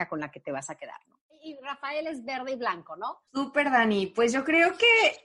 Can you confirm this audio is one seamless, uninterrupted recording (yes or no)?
no